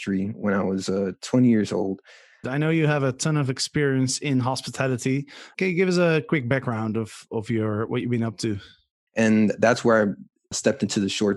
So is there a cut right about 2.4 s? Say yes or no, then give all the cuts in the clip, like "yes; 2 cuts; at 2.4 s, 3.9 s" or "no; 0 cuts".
yes; 2 cuts; at 2.4 s, 9.1 s